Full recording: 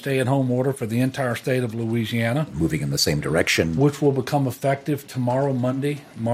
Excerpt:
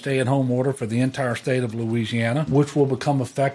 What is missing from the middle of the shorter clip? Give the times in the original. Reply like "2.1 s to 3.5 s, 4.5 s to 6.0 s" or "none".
2.5 s to 3.7 s

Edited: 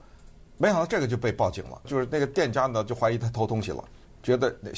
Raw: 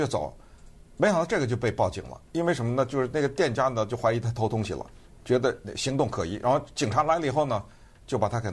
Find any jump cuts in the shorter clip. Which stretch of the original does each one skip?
2.2 s to 2.9 s

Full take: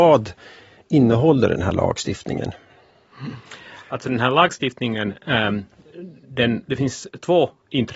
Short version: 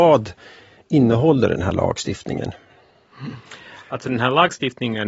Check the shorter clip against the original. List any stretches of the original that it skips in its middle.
none

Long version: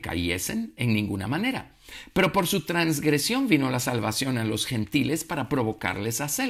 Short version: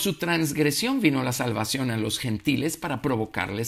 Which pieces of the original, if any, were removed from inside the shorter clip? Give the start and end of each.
none

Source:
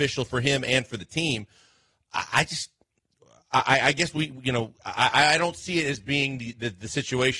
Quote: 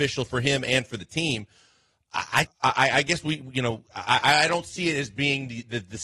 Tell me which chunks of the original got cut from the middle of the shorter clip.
2.5 s to 3.4 s

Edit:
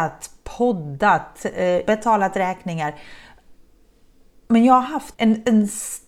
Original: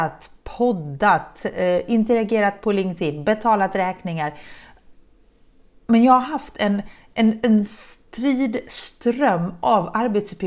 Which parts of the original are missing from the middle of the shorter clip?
1.9 s to 3.2 s, 6.5 s to 7.1 s

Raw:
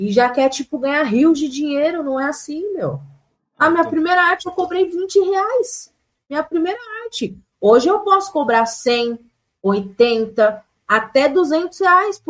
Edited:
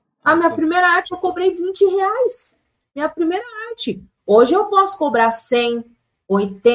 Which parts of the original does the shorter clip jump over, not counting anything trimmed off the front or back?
none

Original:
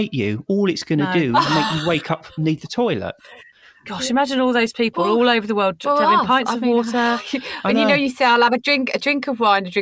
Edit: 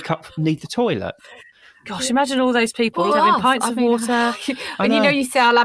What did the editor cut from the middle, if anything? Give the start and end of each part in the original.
5.1 s to 5.9 s

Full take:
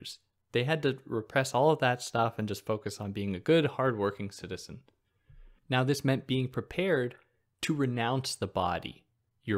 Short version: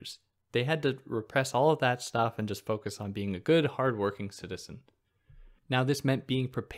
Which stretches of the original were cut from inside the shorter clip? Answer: none

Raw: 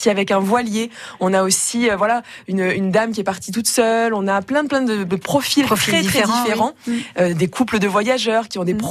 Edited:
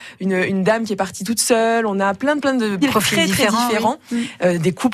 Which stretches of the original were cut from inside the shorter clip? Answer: 5.1 s to 5.6 s

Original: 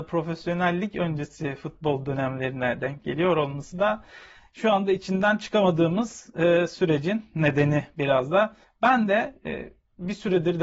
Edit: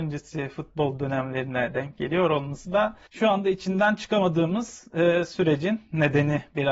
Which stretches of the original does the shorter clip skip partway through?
4.1 s to 4.5 s

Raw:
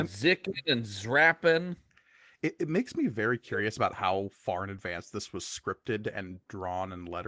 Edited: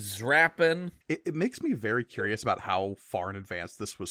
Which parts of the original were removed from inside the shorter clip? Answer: 1.9 s to 2.3 s

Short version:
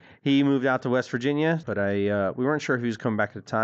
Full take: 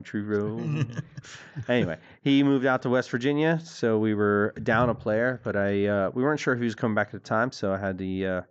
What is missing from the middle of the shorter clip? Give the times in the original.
3.6 s to 5.4 s

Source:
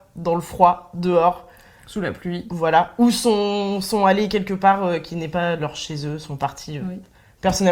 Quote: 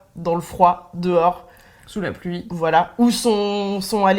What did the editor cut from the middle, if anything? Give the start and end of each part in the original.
none

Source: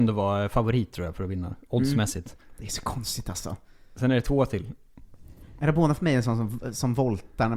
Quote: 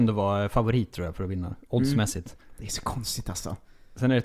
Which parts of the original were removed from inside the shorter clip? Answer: none

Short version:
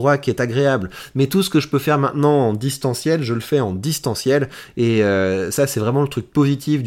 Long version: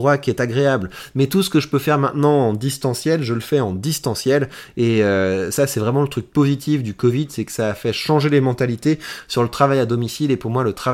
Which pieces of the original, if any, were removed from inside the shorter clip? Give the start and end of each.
none

